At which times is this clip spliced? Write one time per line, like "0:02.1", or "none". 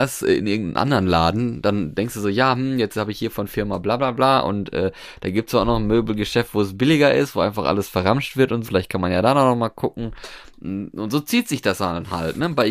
0:08.6